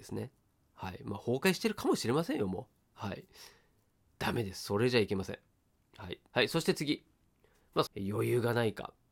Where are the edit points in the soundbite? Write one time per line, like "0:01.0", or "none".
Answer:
0:06.3
0:07.9